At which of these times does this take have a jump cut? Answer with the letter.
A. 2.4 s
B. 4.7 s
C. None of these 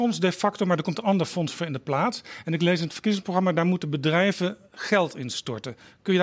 B